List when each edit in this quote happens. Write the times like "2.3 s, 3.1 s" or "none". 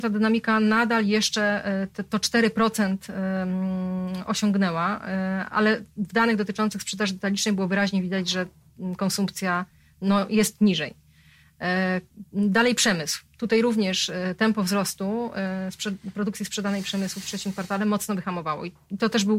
5.5 s